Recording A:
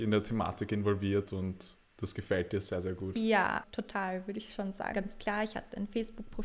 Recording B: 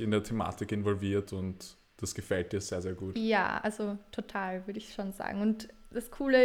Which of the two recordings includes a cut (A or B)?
A